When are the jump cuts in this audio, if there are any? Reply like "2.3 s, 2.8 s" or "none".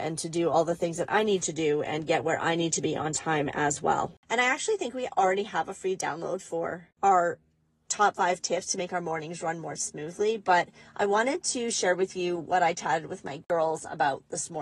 none